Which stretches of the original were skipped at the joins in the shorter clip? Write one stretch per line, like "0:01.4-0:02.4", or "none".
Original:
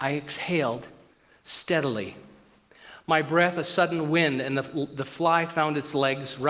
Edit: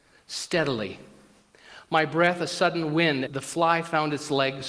0:04.4-0:04.9